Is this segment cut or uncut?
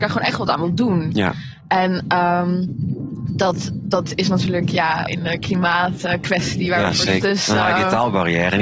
cut